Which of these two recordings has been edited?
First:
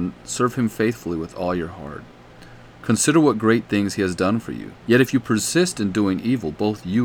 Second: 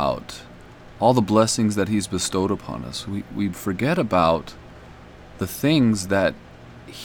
first; 1 cut; at 4.8 s

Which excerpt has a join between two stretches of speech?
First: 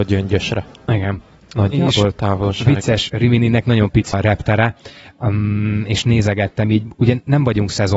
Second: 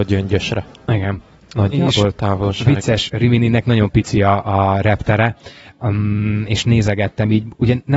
first; 1 cut; at 4.1 s

